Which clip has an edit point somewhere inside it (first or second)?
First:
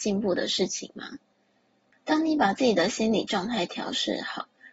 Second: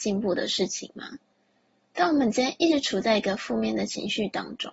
first